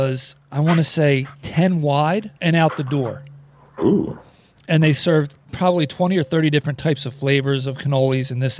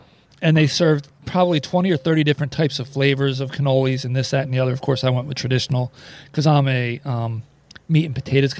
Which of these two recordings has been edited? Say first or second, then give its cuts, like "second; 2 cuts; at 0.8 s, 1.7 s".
first; 1 cut; at 2.4 s